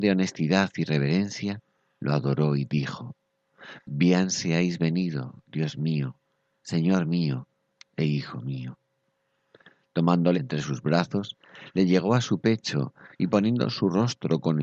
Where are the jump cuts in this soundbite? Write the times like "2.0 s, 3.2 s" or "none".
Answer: 10.3 s